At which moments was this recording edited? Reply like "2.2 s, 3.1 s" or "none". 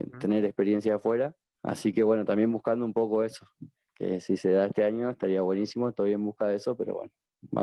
none